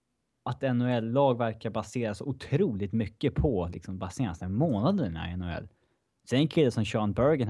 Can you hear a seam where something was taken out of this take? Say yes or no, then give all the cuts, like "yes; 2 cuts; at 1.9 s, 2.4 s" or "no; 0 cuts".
no; 0 cuts